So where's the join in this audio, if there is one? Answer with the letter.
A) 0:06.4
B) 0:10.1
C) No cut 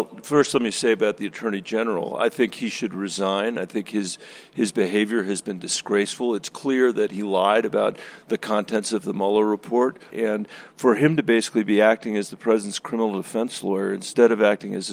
B